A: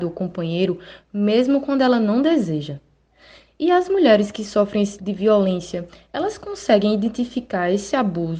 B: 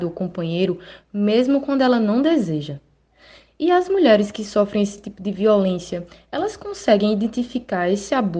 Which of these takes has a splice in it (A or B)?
A